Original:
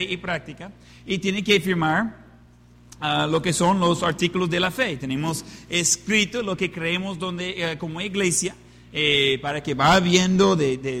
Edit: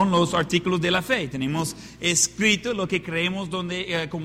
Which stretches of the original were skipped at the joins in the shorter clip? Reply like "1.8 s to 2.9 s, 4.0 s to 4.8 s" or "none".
none